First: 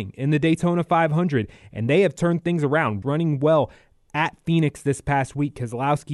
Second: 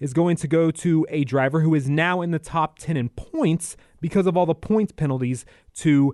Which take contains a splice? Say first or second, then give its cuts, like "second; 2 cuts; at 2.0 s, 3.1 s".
first; 1 cut; at 3.0 s